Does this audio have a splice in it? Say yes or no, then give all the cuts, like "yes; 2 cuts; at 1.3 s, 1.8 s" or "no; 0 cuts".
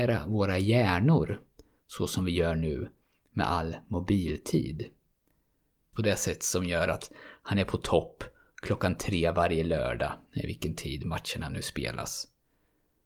yes; 1 cut; at 5.9 s